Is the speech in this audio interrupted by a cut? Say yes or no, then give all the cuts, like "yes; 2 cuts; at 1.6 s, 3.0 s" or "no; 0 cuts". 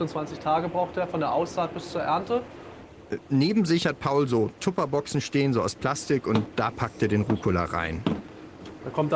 no; 0 cuts